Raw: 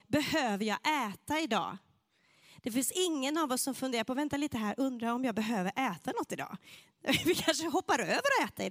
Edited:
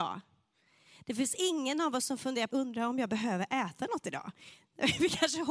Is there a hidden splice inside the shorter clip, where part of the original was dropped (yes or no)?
yes